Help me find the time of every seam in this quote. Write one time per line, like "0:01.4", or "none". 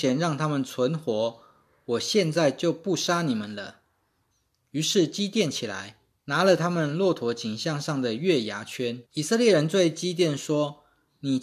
0:04.3
0:06.2
0:09.1